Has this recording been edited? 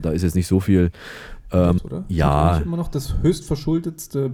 yes; 1 cut; at 1.8 s

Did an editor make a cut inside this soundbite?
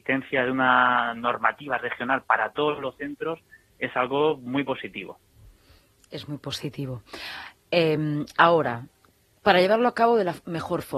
no; 0 cuts

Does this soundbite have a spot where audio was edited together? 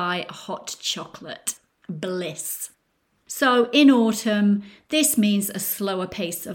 yes; 1 cut; at 3.2 s

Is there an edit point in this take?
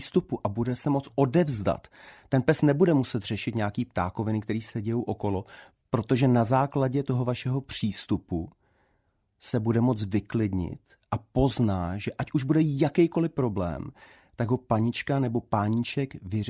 no; 0 cuts

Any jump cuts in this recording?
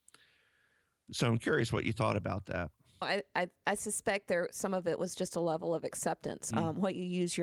yes; 2 cuts; at 3.0 s, 6.5 s

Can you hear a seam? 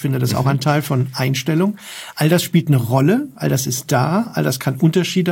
no; 0 cuts

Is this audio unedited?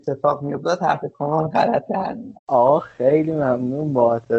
no; 1 cut; at 2.4 s

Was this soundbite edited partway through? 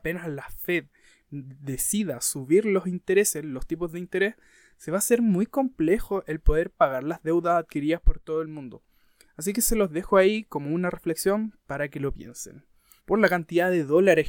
yes; 1 cut; at 13.0 s

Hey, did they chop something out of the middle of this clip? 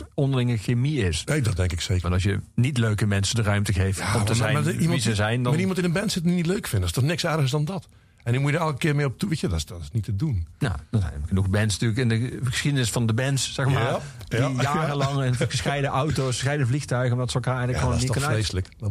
yes; 1 cut; at 2.0 s

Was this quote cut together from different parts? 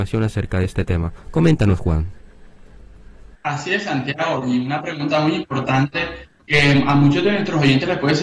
no; 0 cuts

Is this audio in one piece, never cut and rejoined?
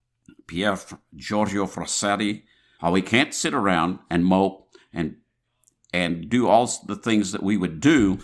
no; 1 cut; at 2.8 s

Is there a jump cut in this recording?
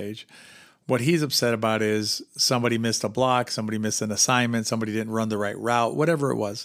no; 0 cuts

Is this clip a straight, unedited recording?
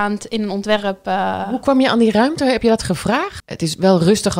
no; 1 cut; at 3.4 s

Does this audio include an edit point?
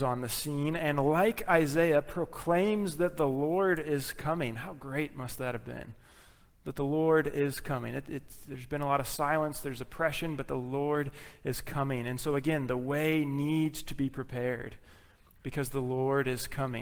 no; 0 cuts

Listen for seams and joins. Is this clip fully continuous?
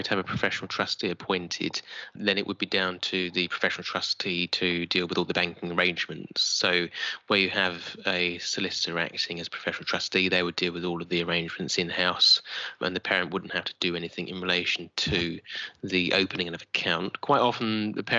yes; 0 cuts

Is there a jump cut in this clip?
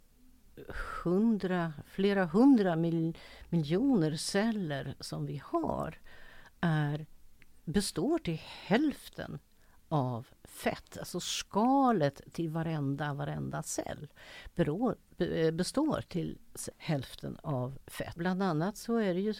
yes; 2 cuts; at 16.7 s, 18.2 s

